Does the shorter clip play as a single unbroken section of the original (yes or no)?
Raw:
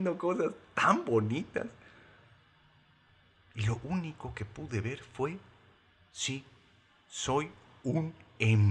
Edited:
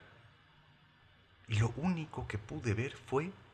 yes